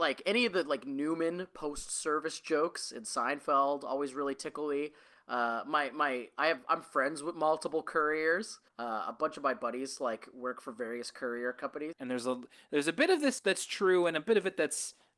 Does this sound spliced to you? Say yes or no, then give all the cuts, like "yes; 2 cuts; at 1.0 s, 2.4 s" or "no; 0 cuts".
yes; 3 cuts; at 8.7 s, 11.9 s, 13.4 s